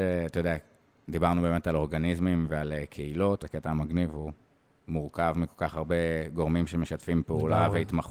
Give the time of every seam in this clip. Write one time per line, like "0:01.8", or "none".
0:03.4